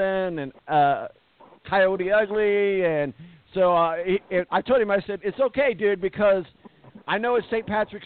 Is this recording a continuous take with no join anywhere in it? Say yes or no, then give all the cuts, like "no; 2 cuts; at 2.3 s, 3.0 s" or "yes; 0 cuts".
no; 1 cut; at 4.5 s